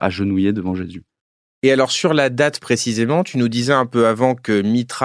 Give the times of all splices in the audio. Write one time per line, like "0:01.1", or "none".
none